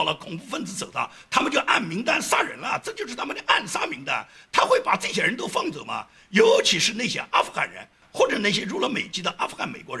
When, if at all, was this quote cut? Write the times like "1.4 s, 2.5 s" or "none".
none